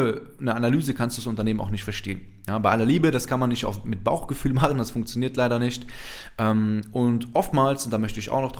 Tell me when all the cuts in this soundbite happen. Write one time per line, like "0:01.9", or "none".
none